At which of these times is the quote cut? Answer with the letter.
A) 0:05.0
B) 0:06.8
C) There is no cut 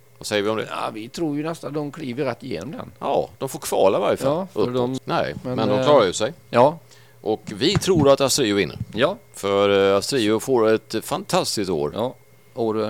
A